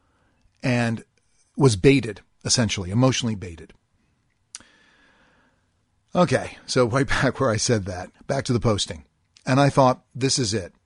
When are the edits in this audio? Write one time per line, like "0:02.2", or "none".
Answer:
0:08.1